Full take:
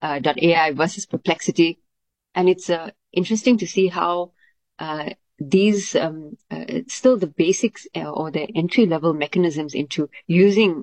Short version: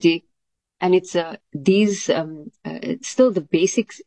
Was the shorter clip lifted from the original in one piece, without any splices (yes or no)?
no